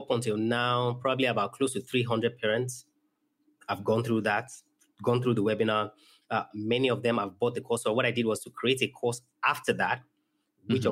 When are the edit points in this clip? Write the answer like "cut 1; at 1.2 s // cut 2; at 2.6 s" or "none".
cut 1; at 6.5 s